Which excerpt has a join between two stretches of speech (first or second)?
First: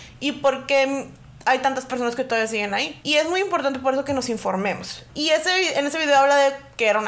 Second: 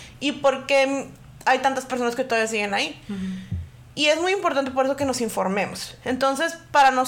first